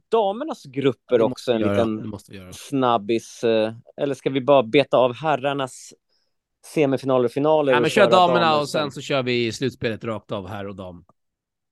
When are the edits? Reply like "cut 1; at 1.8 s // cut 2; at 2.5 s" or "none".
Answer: none